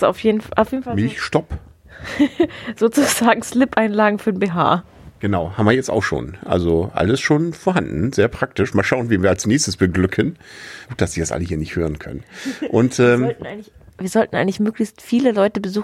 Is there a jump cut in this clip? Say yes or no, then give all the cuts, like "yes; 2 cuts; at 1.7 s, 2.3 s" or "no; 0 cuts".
yes; 1 cut; at 10.9 s